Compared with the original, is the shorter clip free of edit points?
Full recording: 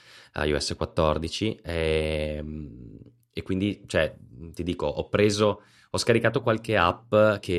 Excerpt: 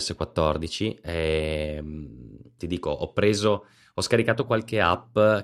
no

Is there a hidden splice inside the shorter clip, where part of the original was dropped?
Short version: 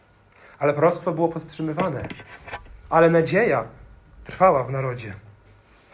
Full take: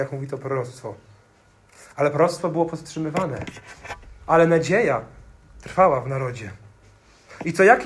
no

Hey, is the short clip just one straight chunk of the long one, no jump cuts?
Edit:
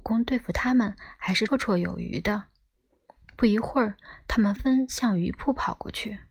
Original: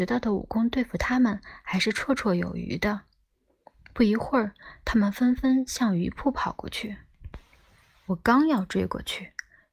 no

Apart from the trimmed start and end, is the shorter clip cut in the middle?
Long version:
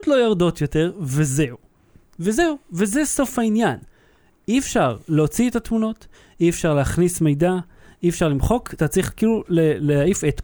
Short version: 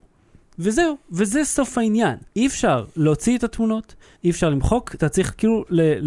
yes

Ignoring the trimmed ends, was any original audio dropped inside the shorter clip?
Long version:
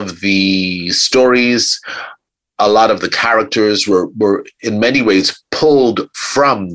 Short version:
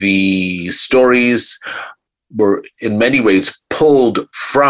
yes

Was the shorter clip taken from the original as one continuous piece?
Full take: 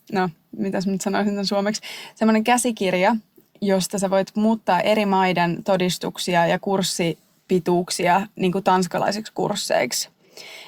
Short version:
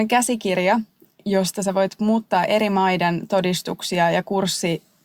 yes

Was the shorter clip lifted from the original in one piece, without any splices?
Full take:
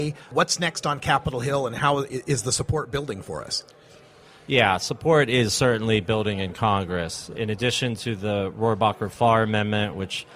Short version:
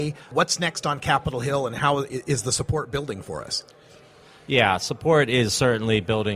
yes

